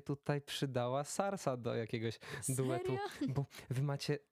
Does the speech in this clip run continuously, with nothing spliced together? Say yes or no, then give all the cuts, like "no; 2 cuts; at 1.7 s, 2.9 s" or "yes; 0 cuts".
yes; 0 cuts